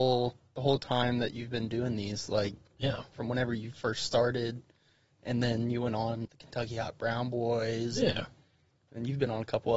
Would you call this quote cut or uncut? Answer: cut